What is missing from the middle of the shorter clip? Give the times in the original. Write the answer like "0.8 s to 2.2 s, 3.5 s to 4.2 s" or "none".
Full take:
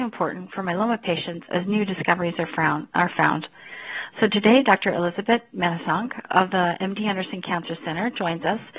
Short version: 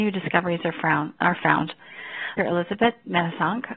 4.1 s to 4.9 s